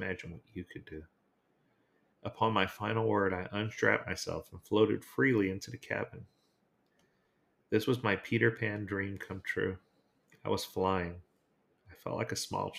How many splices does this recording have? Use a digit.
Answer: 1